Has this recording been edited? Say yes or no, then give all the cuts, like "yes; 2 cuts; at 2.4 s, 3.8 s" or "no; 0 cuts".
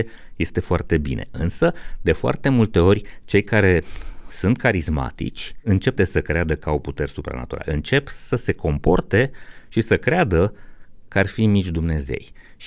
yes; 1 cut; at 6.0 s